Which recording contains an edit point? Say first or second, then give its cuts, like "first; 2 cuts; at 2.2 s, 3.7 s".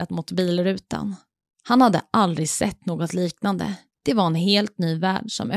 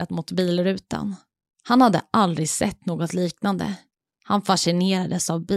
first; 1 cut; at 3.9 s